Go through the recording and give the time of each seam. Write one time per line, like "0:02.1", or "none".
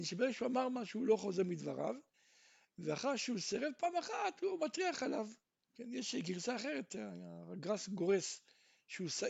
0:05.7